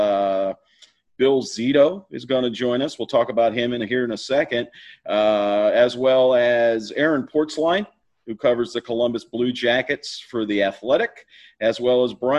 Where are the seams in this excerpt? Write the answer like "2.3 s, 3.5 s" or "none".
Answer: none

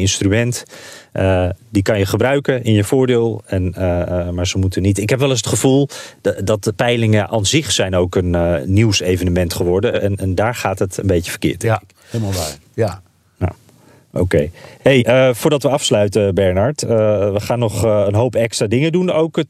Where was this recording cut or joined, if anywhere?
none

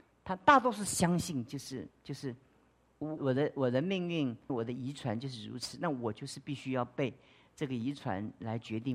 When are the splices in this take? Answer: 3.2 s, 4.5 s

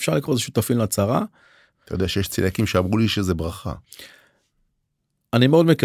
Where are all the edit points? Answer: 1.7 s

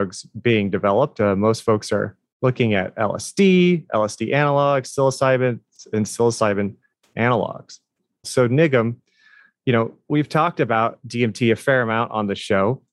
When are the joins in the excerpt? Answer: 8.2 s, 10.0 s

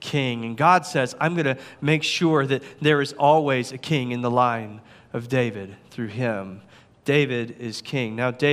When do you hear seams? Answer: none

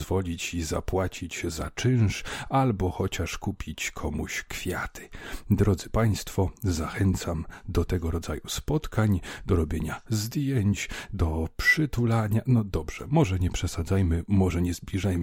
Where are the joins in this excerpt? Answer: none

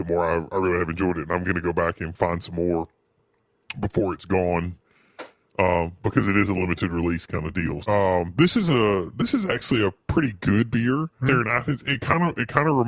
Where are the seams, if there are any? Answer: 7.8 s, 11.2 s

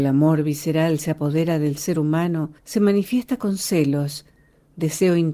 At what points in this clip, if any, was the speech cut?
2.6 s

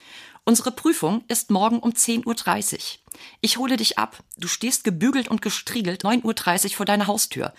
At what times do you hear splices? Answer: 6.0 s

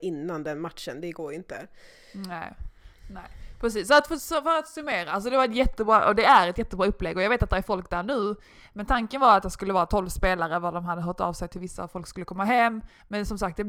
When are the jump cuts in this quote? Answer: none

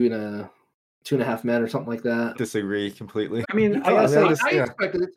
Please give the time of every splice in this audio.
2.3 s, 3.4 s

